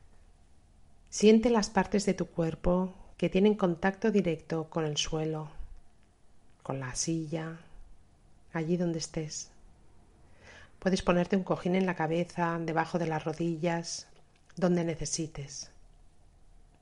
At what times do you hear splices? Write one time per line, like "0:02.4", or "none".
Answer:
0:10.7